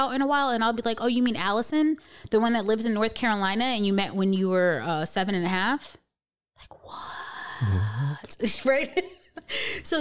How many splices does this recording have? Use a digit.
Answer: 0